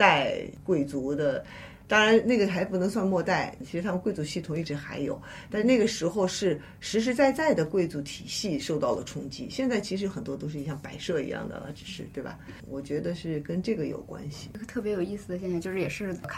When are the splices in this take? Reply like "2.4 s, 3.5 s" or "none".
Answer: none